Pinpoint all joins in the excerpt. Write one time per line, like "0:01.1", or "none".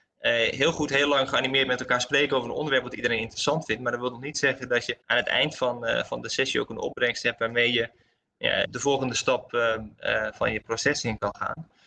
0:05.0
0:08.6